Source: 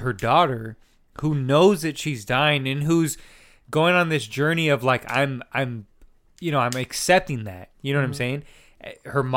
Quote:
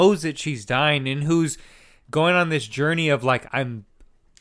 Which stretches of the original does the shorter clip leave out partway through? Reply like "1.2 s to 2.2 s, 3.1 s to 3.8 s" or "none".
5.0 s to 5.5 s